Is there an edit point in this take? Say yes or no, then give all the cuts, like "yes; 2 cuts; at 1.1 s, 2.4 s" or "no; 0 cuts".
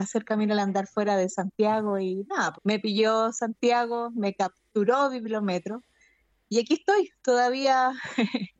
yes; 1 cut; at 2.5 s